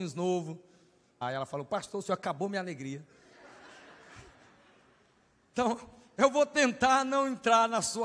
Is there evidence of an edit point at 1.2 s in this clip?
yes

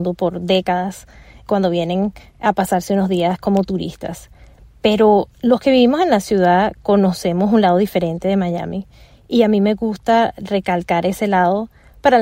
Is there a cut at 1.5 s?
yes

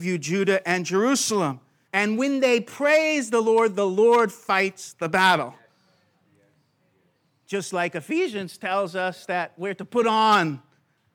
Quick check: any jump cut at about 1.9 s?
yes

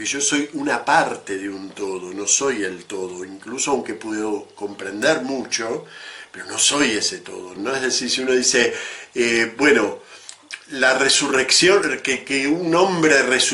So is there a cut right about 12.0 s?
no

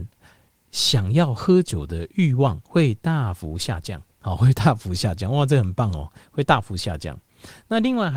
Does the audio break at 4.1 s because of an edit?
yes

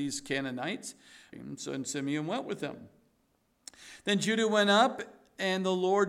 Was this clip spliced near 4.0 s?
no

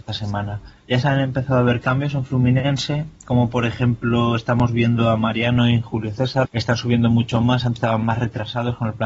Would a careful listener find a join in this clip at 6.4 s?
yes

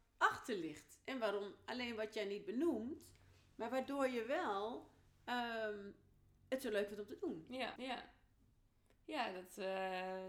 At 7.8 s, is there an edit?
yes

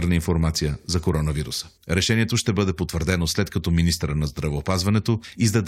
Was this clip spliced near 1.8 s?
yes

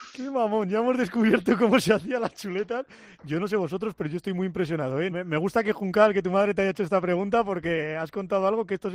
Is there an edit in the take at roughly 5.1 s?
yes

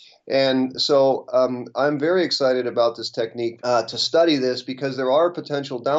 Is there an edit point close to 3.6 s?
yes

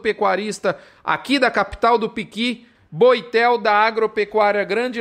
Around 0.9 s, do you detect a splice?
no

